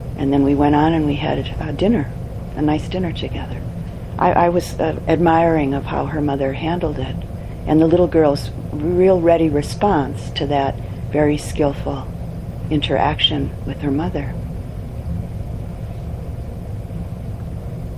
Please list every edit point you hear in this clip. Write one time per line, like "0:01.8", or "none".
0:05.0